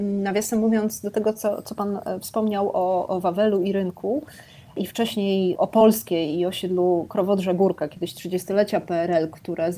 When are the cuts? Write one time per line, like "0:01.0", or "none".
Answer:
0:05.5